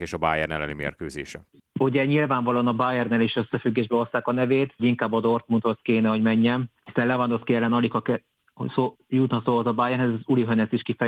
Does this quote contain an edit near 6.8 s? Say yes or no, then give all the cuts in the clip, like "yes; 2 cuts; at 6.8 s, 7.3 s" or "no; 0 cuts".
no; 1 cut; at 4.8 s